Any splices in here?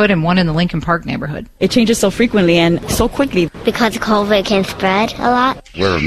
yes; 1 cut; at 1.6 s

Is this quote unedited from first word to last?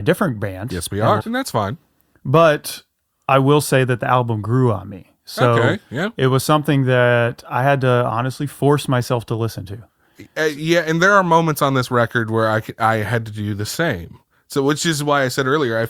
no; 1 cut; at 1.2 s

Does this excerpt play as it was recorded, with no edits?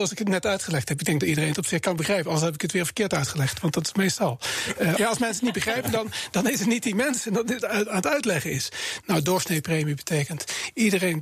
no; 3 cuts; at 5.0 s, 7.6 s, 9.0 s

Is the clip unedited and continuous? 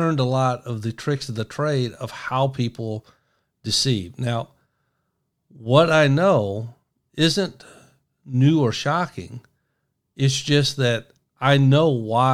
yes; 0 cuts

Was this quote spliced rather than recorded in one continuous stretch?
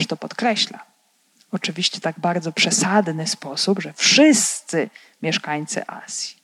no; 0 cuts

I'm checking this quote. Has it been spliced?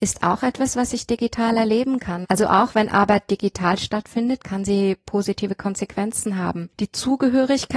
yes; 2 cuts; at 2.2 s, 4.4 s

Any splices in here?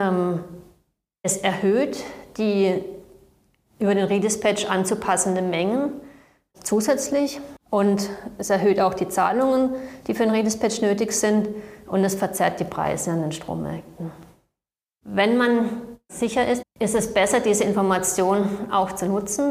yes; 2 cuts; at 14.8 s, 16.6 s

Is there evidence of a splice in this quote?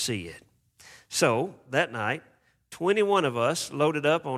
no; 0 cuts

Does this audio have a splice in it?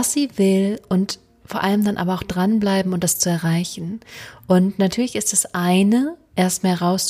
no; 0 cuts

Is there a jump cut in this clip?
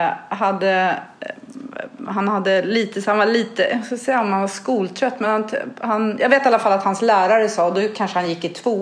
no; 0 cuts

